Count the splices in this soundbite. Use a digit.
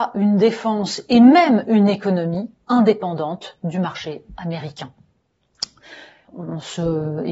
1